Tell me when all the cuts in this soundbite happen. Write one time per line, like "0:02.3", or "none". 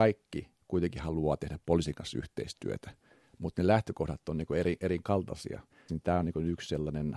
0:05.9